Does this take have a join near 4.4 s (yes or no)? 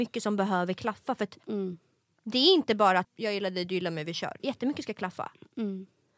yes